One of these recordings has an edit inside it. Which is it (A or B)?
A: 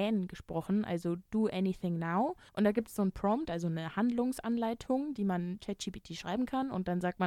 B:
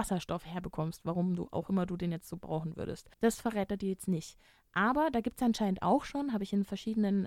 B